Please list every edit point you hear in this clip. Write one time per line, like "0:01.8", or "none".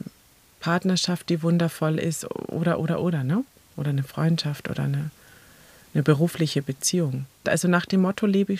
0:07.4